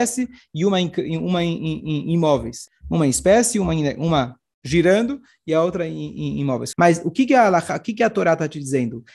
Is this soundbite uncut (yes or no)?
no